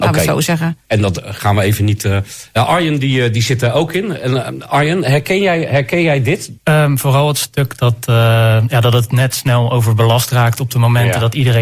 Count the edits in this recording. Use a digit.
1